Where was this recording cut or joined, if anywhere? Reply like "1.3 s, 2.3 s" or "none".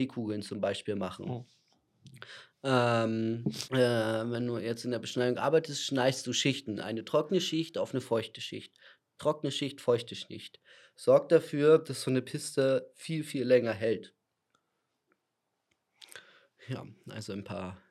3.7 s